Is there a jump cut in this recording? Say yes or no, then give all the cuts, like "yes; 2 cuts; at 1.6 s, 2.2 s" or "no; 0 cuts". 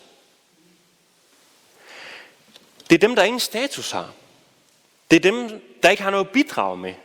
no; 0 cuts